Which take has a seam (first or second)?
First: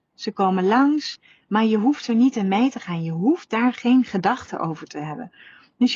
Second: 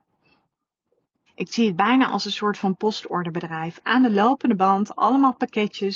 second